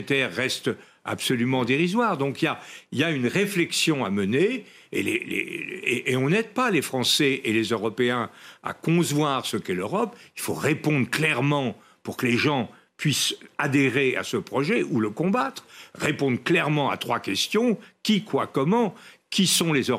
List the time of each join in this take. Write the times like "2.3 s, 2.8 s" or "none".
none